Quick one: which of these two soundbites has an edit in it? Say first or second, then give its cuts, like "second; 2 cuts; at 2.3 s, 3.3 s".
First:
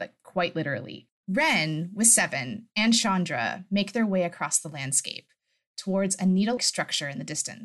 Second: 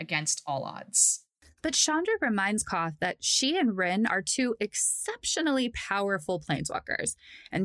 first; 1 cut; at 6.6 s